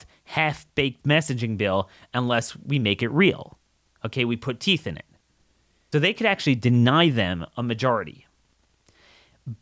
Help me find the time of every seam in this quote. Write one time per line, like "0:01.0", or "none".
0:05.9